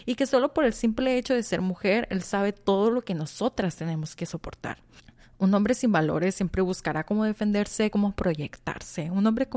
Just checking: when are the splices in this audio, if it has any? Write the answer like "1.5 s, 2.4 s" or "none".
7.9 s